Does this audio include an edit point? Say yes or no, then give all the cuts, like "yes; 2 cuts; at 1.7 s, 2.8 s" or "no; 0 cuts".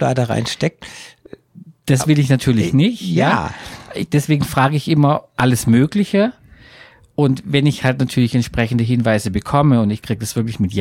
no; 0 cuts